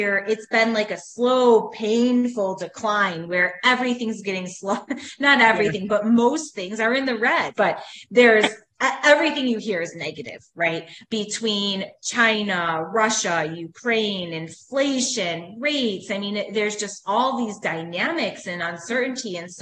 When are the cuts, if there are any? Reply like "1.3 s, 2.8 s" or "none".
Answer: 7.5 s